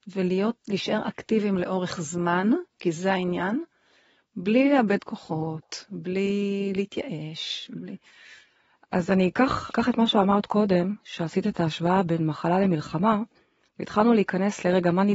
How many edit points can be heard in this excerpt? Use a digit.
1